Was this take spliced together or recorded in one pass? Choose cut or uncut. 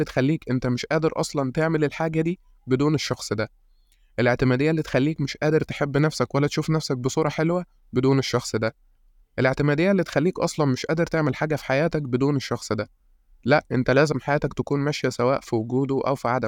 uncut